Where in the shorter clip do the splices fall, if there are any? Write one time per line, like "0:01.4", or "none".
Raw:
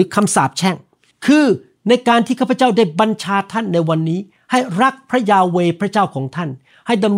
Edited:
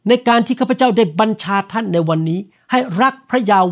none

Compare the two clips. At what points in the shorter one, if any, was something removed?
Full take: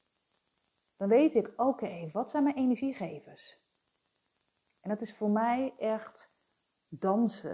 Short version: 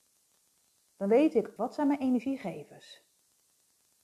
0:01.6

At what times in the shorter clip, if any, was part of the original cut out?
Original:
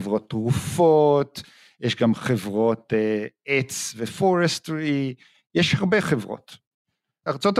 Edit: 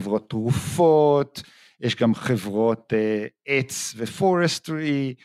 none

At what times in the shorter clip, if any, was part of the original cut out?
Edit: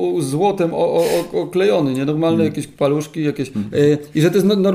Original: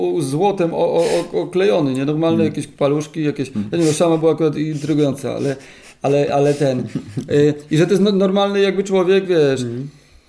0:03.7

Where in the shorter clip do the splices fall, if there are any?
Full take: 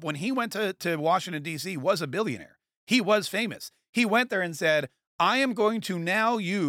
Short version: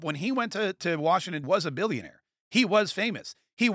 0:01.4

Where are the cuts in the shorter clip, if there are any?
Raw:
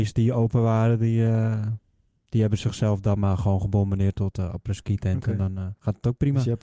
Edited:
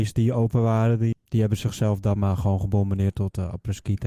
0:01.1

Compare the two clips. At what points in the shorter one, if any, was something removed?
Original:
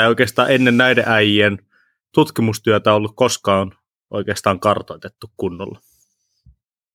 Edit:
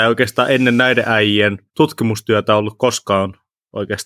0:01.7

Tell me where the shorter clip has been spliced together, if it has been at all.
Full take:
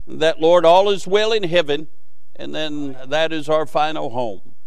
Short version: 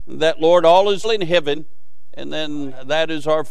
0:01.0

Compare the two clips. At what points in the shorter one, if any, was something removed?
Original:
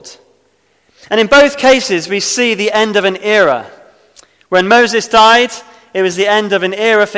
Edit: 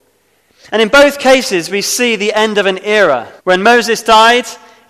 0:03.4

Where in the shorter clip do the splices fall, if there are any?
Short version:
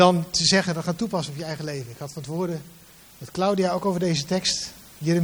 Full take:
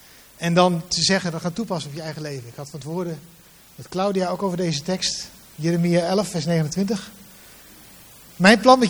none

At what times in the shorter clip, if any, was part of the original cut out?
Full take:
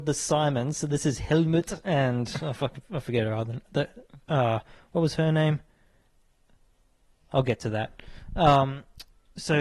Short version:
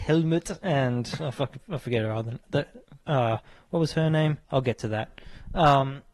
0:04.4

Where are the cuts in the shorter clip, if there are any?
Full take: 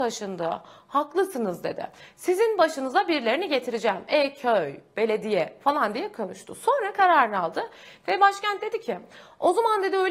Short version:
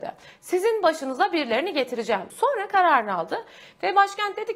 0:02.3

